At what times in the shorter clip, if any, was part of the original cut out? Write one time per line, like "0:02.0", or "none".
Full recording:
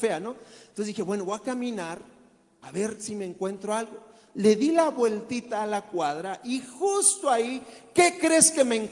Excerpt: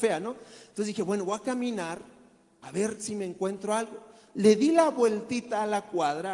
none

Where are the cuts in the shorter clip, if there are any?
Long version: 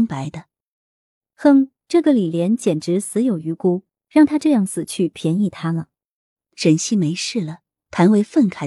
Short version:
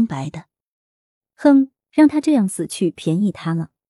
0:01.8

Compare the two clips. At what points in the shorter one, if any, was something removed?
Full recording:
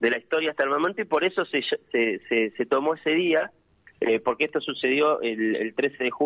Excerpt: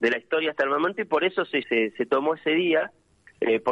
0:01.6

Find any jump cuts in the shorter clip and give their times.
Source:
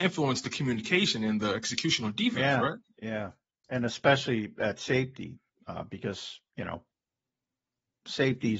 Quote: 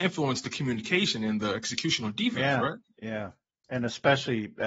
none

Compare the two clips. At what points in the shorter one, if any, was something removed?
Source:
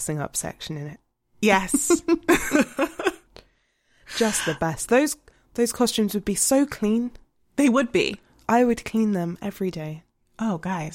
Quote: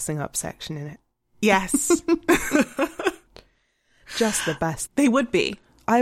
0:04.9

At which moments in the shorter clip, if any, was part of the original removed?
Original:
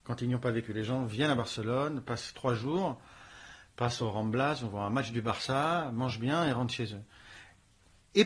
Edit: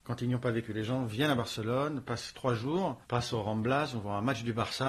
0:03.0

